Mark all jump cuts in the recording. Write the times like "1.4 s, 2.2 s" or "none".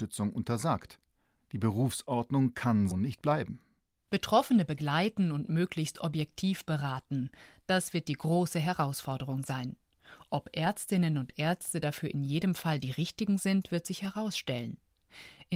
2.9 s